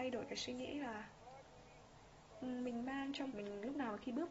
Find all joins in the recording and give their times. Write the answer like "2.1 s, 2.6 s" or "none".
3.3 s